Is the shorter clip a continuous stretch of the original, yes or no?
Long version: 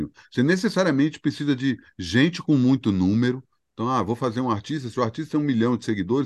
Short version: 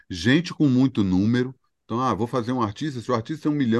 yes